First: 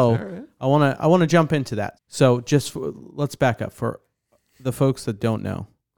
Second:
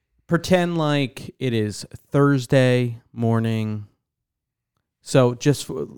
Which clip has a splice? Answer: first; 1 cut; at 1.9 s

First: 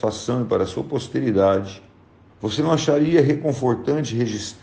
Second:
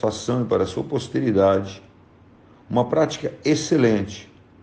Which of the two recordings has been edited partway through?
first; 1 cut; at 2.3 s

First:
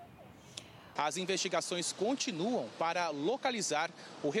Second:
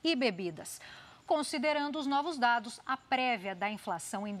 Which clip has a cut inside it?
first; 1 cut; at 1.0 s

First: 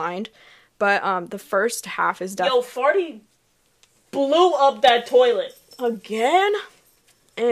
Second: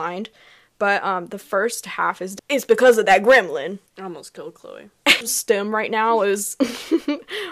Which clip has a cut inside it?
second; 3 cuts; at 2.4 s, 3.9 s, 5.2 s

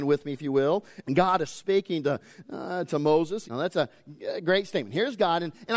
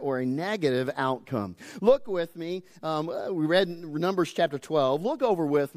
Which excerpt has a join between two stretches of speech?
first; 2 cuts; at 1.0 s, 3.5 s

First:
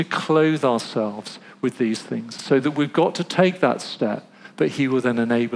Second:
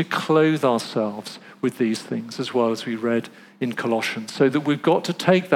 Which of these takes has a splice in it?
first; 1 cut; at 2.4 s

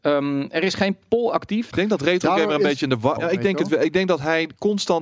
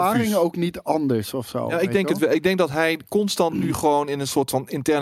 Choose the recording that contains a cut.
first; 2 cuts; at 1.7 s, 3.2 s

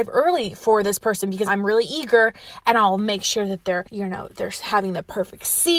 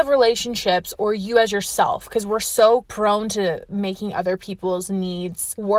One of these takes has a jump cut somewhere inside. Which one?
first; 1 cut; at 1.5 s

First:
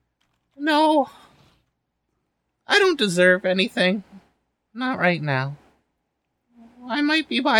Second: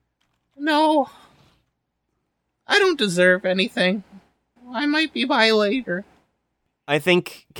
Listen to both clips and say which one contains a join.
second; 1 cut; at 4.6 s

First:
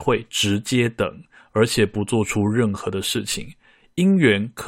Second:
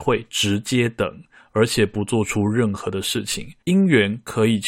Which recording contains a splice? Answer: second; 1 cut; at 3.6 s

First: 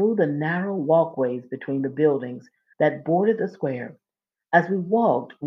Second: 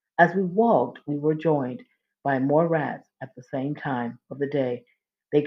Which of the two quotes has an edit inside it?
first; 1 cut; at 2.7 s

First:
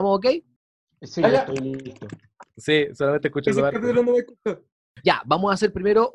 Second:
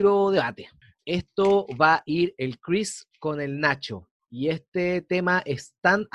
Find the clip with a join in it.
first; 2 cuts; at 2.5 s, 5.0 s

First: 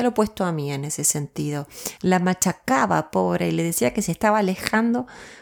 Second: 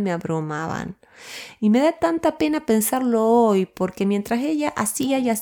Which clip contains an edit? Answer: first; 1 cut; at 2.0 s

